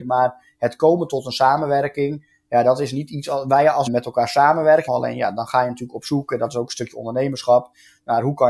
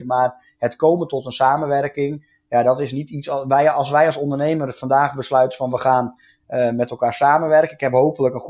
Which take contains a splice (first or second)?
first